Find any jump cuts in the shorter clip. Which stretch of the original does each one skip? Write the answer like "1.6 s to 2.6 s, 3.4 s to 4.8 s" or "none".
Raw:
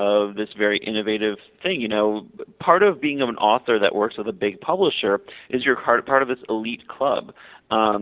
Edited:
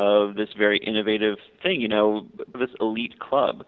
2.5 s to 6.2 s